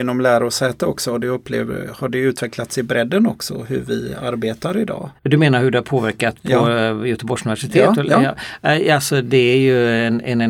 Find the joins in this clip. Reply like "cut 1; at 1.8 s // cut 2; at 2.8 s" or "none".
cut 1; at 5.2 s